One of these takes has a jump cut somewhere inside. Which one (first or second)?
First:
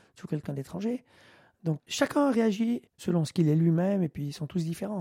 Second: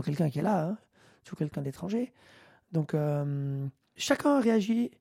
first